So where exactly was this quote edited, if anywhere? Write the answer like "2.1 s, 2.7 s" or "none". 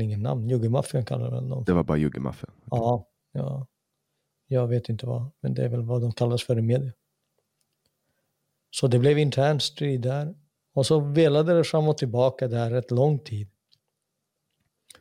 5.4 s, 10.6 s